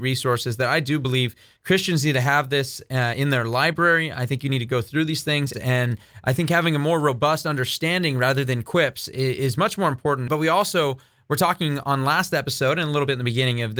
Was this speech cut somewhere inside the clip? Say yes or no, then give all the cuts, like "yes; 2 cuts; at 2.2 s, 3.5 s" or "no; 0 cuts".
yes; 2 cuts; at 5.5 s, 10.3 s